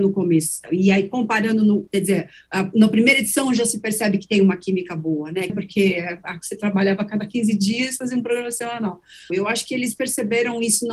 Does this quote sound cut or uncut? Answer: cut